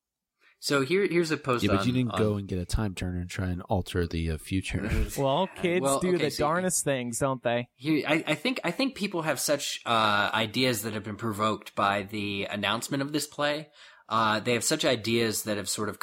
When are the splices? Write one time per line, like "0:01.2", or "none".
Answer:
none